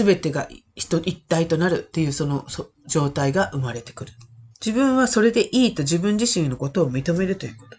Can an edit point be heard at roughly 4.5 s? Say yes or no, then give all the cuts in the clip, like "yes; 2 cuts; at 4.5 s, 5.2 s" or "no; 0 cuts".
yes; 1 cut; at 4.5 s